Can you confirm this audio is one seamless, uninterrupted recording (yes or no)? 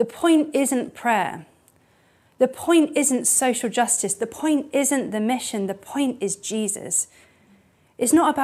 yes